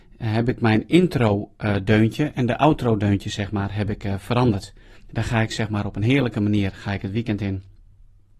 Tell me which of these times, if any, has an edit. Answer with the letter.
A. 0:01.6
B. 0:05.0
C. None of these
B